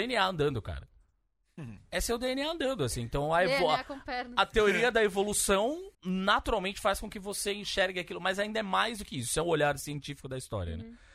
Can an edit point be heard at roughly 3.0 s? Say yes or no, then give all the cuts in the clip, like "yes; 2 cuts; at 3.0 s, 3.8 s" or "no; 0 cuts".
no; 1 cut; at 5.9 s